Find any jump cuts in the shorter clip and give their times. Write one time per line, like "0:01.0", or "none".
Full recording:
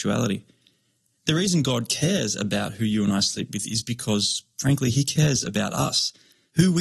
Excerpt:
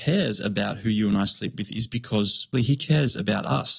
0:02.5